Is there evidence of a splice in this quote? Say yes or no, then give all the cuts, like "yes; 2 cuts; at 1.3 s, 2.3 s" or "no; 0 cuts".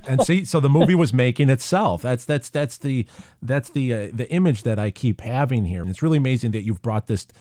yes; 1 cut; at 5.8 s